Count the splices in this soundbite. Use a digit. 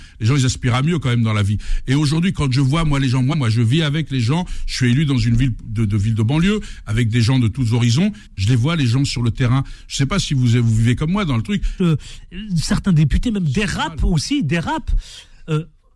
3